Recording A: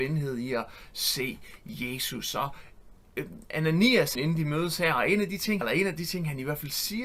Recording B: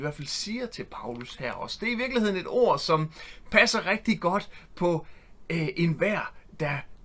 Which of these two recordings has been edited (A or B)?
A